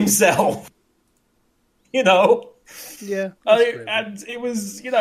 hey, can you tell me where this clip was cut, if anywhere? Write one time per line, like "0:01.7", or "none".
0:03.3